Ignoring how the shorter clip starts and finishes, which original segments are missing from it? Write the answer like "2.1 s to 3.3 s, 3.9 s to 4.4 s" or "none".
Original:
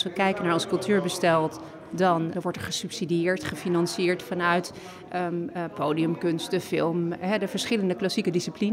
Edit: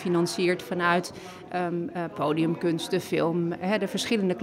none